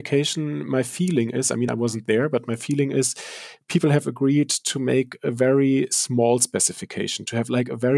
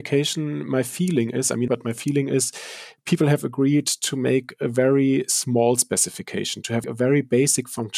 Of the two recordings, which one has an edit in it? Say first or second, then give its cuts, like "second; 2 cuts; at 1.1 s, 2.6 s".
second; 2 cuts; at 1.7 s, 6.8 s